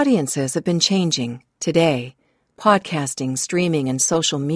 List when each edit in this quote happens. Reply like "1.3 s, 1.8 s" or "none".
1.5 s